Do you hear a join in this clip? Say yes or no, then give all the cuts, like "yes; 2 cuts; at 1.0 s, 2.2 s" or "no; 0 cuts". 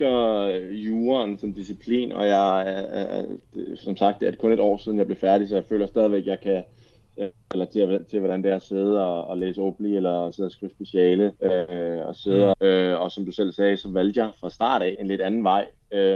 yes; 3 cuts; at 11.4 s, 12.5 s, 14.9 s